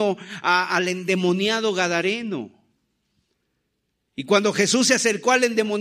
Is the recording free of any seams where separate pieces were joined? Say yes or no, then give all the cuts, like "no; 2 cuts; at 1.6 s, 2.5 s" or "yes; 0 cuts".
yes; 0 cuts